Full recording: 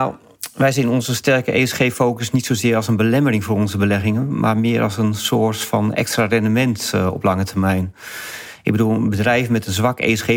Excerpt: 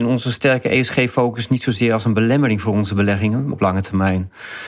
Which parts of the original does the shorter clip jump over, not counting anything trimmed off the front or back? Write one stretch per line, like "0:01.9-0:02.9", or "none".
0:04.3-0:07.1

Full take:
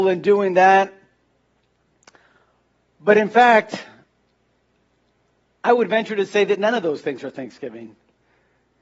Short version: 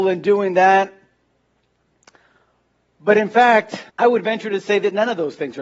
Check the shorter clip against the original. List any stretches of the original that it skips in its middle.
0:03.9-0:05.6

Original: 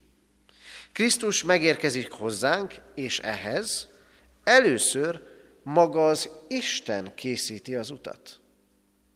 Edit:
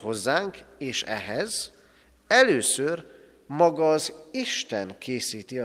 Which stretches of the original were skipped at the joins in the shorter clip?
none

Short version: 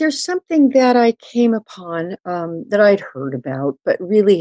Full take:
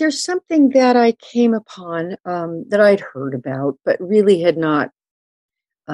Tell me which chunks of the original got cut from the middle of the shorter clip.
none

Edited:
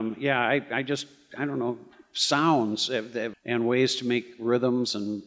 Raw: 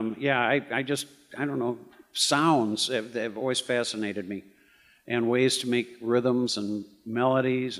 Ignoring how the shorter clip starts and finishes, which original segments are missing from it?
0:03.3-0:05.0

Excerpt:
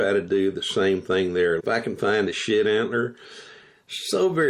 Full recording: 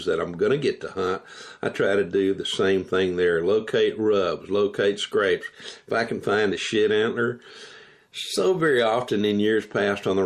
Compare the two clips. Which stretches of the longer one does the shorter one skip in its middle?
0:03.4-0:05.8

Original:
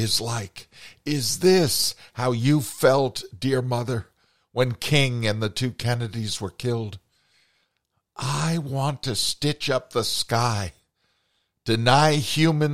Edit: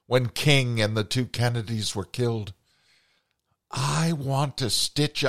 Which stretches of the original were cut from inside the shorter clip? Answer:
none

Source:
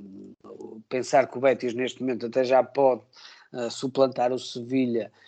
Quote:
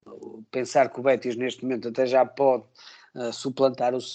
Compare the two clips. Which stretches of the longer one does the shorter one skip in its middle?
none

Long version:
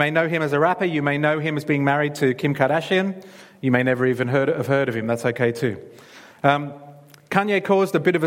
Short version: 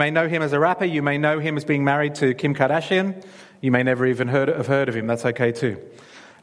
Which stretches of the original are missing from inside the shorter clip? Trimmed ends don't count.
none

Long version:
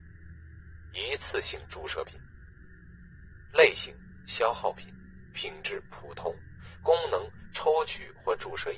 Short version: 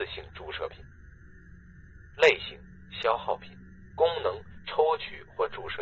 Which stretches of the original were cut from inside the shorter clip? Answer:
0:05.3-0:06.8

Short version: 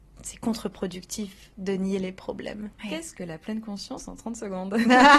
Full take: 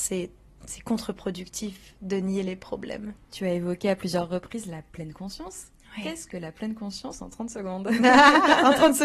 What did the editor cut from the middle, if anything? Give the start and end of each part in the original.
0:03.2-0:05.9

